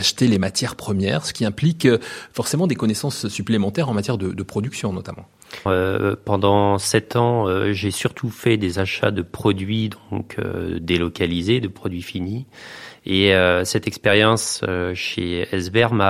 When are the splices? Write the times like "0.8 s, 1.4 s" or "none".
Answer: 5.7 s